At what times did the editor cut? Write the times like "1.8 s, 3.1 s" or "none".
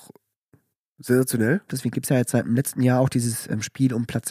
1.7 s